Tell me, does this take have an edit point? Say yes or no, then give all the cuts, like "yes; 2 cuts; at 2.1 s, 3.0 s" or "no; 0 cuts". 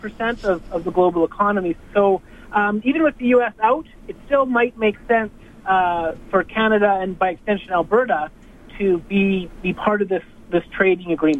yes; 1 cut; at 1.8 s